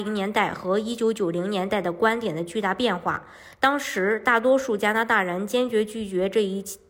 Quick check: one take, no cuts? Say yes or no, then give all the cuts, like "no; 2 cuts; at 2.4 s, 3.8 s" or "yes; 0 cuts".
yes; 0 cuts